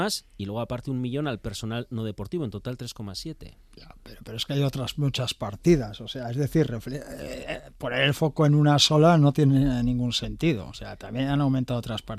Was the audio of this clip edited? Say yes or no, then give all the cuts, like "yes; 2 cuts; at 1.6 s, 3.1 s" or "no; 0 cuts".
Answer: no; 0 cuts